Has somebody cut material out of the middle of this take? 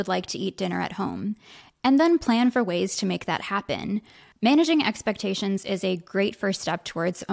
no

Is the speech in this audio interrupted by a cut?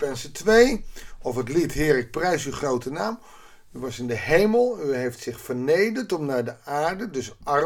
no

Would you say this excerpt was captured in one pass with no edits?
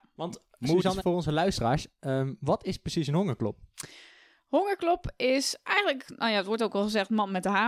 no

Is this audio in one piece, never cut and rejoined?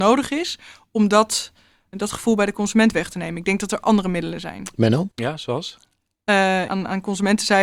no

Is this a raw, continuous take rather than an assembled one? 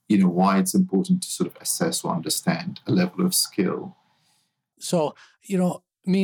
no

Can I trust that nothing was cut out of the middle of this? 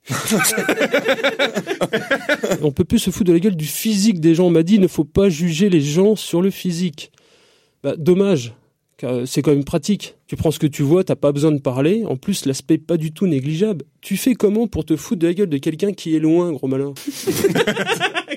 yes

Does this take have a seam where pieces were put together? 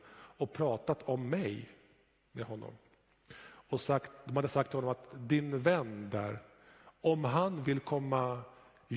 no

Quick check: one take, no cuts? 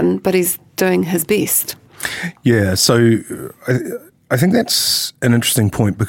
yes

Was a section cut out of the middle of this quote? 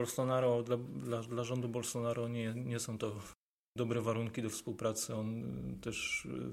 no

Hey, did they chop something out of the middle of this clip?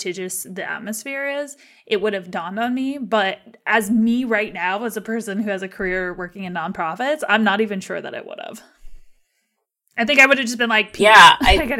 no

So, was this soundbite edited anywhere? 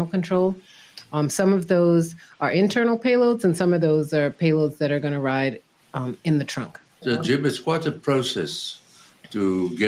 no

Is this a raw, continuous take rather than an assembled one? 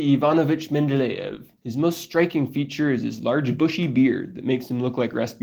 no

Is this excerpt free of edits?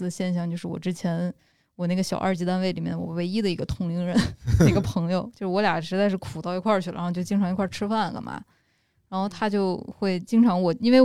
yes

